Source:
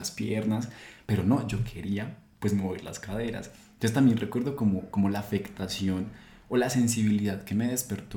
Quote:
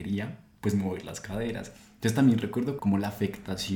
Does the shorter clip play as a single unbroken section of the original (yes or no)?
no